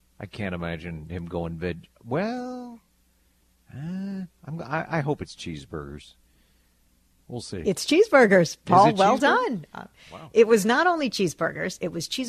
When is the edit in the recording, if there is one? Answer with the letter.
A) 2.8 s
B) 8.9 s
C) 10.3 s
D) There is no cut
D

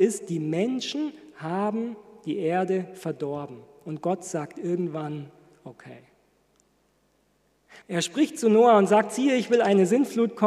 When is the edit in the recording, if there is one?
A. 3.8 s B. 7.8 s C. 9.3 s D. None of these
B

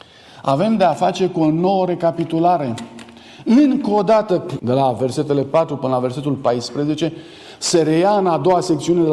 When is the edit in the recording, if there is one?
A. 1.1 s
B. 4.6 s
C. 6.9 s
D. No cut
B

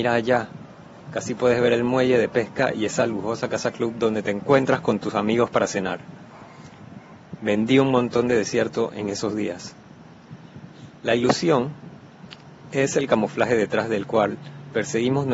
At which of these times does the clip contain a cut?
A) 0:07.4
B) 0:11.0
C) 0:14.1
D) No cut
D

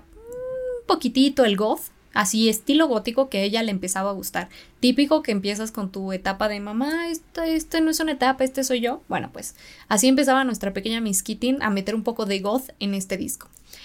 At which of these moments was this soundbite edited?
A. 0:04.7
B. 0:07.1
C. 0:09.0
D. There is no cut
D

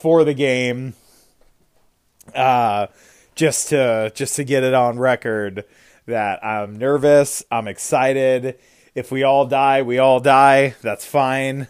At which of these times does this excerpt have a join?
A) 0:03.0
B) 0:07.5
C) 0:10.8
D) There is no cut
D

